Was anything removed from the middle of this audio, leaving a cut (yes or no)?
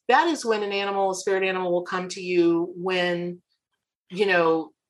no